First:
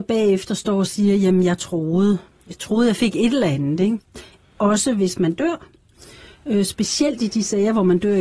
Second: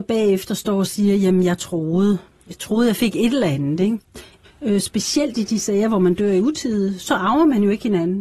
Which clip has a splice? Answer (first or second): second